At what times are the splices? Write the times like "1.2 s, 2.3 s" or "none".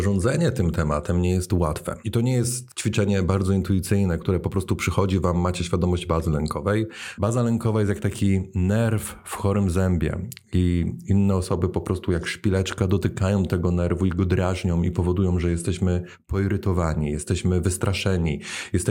2.0 s, 7.2 s